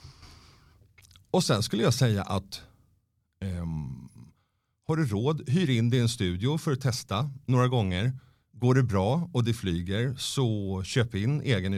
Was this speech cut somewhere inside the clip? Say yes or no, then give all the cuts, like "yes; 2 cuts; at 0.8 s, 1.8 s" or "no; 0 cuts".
no; 0 cuts